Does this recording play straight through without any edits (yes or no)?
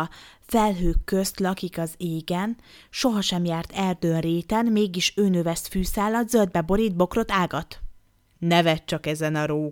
yes